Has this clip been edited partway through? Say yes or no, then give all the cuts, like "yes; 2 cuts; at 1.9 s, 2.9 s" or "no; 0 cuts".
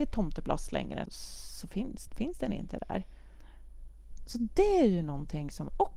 yes; 2 cuts; at 1.1 s, 2.1 s